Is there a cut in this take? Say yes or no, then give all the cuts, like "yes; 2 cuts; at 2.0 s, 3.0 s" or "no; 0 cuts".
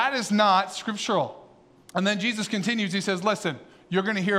yes; 1 cut; at 1.8 s